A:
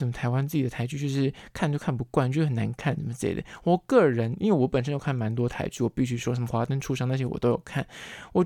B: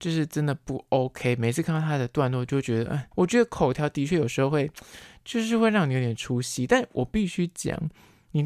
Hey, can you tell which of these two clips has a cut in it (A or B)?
B